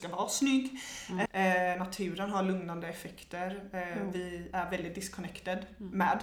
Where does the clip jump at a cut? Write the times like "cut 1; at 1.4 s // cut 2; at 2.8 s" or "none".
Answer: cut 1; at 1.3 s